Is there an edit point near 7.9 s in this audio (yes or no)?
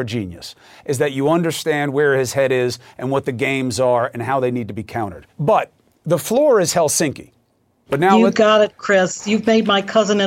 yes